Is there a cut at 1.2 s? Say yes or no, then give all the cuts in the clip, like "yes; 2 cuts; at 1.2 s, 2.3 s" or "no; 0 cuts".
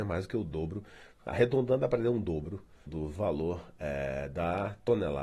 no; 1 cut; at 2.9 s